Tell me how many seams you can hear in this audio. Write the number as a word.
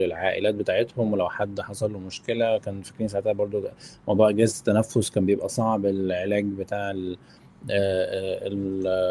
zero